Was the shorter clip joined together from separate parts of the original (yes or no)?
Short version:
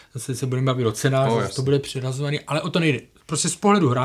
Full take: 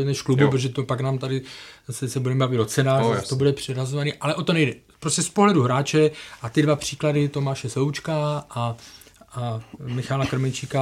no